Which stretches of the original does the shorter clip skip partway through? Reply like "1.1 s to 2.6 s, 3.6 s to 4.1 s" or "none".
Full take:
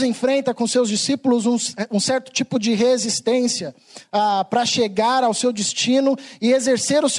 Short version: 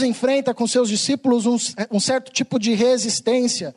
none